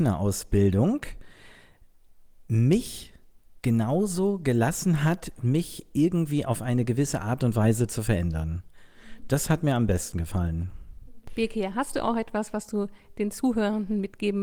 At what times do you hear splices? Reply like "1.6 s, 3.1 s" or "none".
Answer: 5.4 s

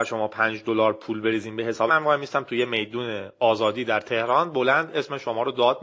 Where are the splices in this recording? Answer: 1.9 s

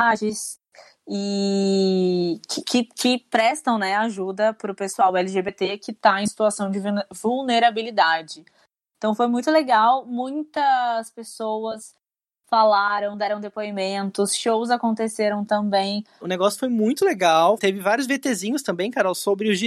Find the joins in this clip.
16.2 s, 17.6 s

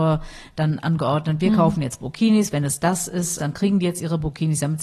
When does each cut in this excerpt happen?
3.4 s

